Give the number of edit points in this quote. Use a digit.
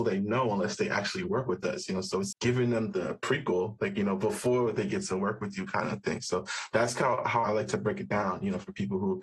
1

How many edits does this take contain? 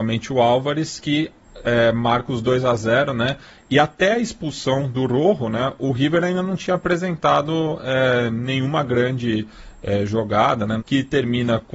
1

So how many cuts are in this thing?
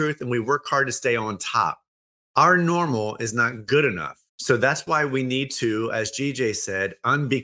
1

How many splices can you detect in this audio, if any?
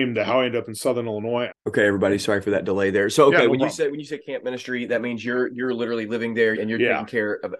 2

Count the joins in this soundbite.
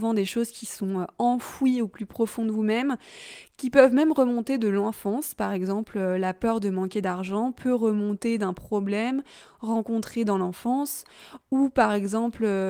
0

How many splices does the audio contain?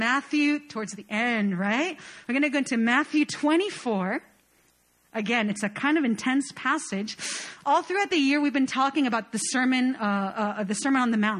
0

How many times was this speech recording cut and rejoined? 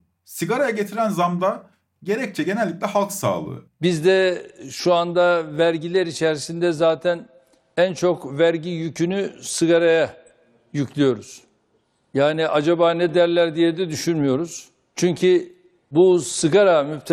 1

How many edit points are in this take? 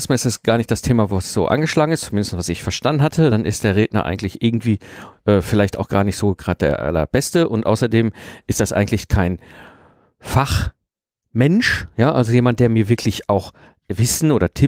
0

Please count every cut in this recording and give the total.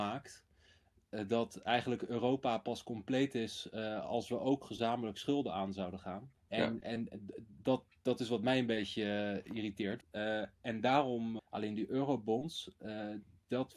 3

